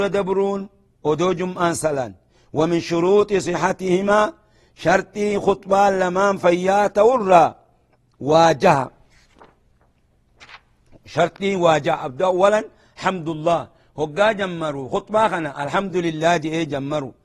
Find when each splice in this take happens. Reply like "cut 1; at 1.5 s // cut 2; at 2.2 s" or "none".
none